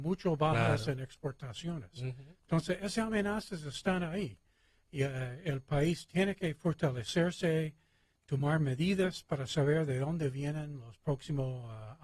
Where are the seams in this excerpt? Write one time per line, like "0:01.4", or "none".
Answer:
none